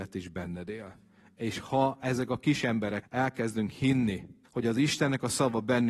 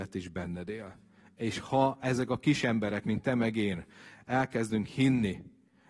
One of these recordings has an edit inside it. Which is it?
first; 2 cuts; at 3.0 s, 4.4 s

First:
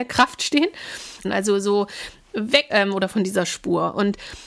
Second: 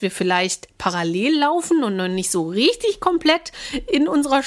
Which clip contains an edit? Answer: first; 2 cuts; at 1.2 s, 2.7 s

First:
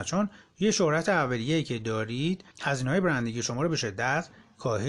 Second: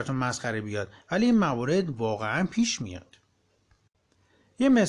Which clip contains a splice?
first; 1 cut; at 2.5 s

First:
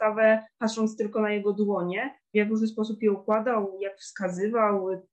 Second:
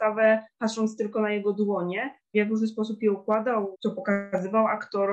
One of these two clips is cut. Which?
second; 1 cut; at 3.7 s

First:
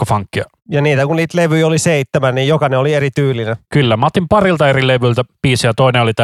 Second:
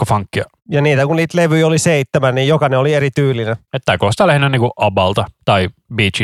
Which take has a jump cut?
second; 1 cut; at 3.7 s

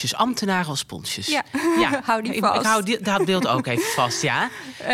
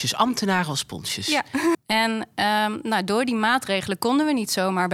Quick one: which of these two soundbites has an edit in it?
second; 1 cut; at 1.7 s

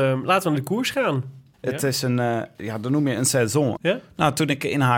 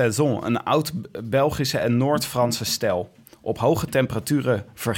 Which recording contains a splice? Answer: first; 2 cuts; at 1.5 s, 3.8 s

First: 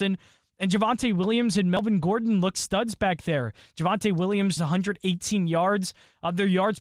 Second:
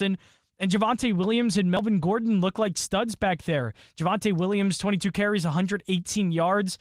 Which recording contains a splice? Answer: first; 2 cuts; at 2.5 s, 4.6 s

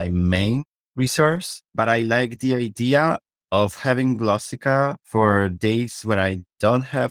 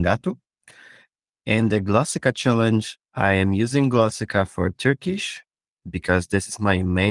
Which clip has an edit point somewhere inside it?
first; 2 cuts; at 1.7 s, 5.0 s

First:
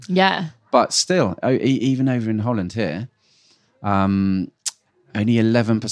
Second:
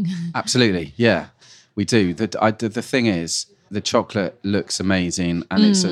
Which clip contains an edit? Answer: second; 1 cut; at 3.7 s

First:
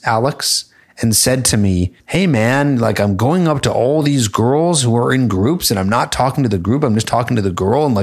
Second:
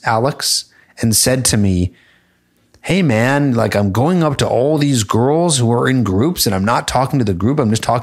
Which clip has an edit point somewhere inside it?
first; 1 cut; at 2.0 s

